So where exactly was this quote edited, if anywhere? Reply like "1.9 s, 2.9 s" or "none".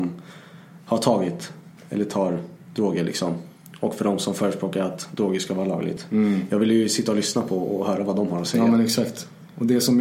none